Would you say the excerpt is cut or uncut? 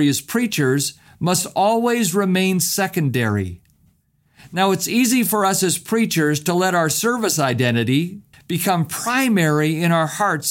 cut